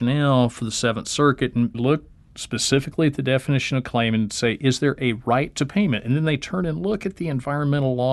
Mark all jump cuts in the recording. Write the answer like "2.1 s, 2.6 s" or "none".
1.7 s